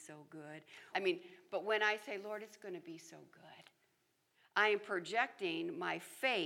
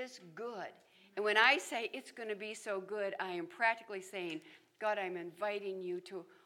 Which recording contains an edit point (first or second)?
first